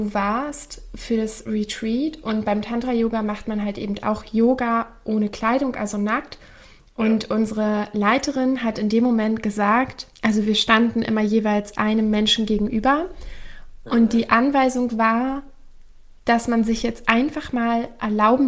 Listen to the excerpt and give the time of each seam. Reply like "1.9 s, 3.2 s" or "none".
10.1 s